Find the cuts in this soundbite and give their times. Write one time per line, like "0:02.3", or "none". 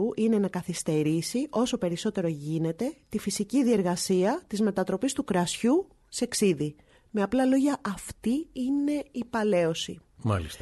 none